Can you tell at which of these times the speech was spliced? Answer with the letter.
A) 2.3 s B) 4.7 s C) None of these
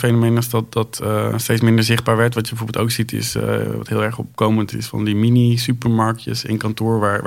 B